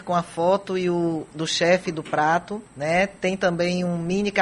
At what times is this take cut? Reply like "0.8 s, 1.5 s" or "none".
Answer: 2.7 s